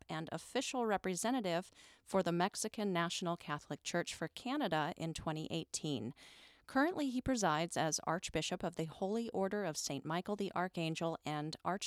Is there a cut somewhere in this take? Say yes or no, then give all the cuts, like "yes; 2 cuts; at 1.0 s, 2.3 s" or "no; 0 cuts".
no; 0 cuts